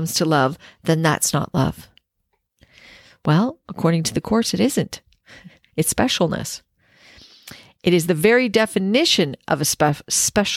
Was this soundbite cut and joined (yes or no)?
no